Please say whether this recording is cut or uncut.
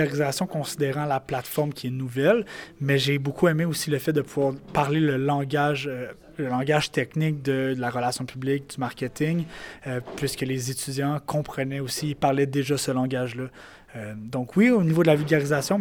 uncut